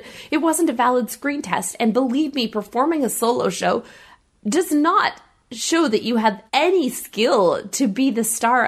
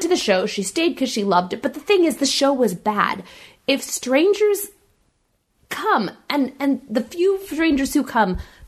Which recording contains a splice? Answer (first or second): first